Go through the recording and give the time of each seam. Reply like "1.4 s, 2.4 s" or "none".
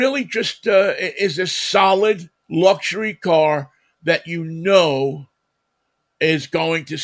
2.4 s